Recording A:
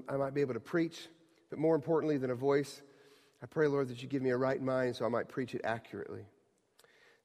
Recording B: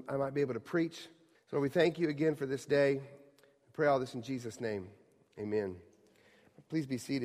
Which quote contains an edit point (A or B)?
B